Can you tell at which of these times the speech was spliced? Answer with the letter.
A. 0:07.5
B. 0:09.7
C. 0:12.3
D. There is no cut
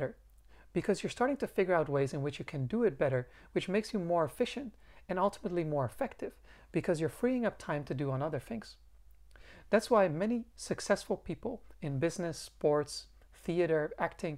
D